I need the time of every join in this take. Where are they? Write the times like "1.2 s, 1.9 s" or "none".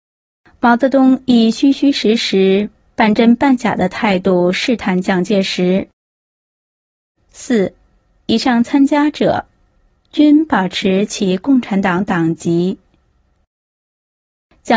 7.2 s